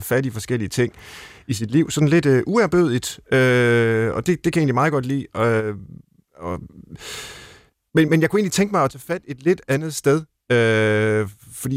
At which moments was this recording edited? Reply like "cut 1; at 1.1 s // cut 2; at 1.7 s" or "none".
cut 1; at 8.1 s